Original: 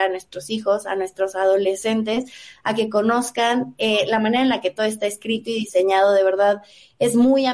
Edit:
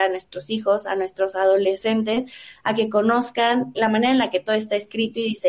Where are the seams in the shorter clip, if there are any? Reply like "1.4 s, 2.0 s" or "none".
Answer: 3.7 s